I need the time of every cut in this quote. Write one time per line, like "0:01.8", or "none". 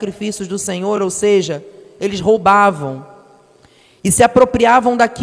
none